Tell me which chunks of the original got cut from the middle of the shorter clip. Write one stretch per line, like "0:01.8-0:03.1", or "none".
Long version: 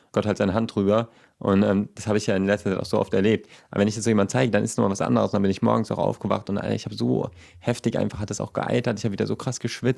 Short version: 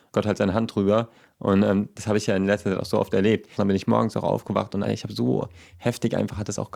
0:03.6-0:05.3
0:06.6-0:06.7